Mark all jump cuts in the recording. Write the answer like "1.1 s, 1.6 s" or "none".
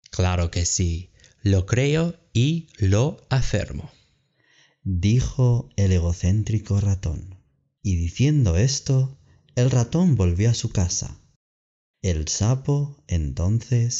none